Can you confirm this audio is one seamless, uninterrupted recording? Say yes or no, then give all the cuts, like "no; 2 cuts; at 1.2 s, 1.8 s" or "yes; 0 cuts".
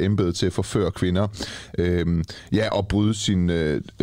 yes; 0 cuts